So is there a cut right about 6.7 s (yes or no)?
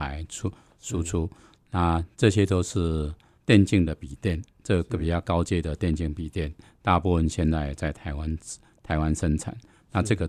no